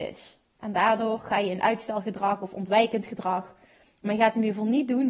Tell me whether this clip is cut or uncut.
uncut